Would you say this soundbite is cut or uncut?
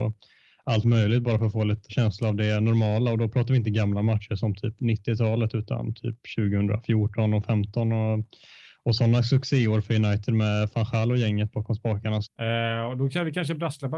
cut